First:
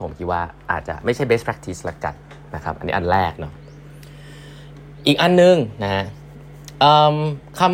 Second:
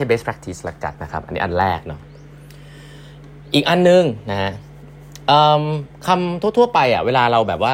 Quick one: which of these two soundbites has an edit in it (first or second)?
second